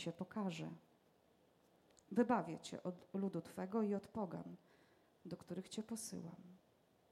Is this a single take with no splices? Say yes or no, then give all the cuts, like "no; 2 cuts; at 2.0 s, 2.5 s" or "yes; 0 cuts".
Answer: yes; 0 cuts